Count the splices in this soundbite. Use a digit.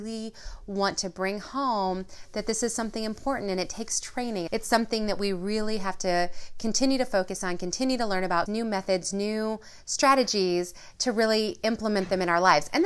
2